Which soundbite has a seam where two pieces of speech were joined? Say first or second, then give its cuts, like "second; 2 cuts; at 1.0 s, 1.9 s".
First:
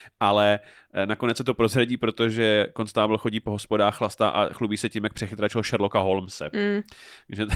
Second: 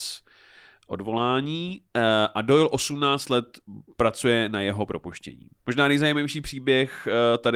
second; 1 cut; at 5.6 s